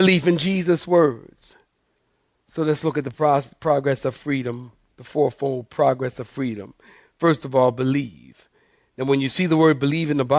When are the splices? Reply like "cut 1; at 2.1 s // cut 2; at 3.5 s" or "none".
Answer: none